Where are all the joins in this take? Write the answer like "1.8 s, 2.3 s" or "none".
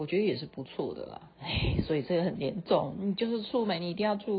1.3 s